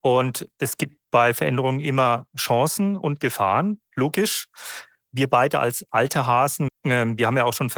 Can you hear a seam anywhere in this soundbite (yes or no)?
yes